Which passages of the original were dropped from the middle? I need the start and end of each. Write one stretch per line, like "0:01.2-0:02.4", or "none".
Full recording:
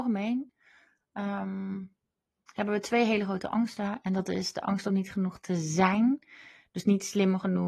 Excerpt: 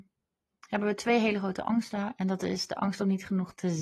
none